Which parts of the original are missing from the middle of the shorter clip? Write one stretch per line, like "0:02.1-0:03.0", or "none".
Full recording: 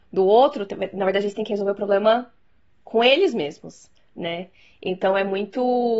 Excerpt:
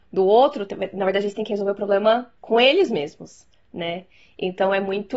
0:02.4-0:02.8